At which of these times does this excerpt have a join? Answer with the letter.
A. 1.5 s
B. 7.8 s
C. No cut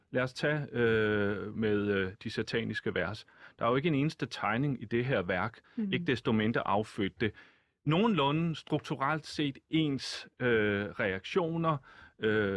A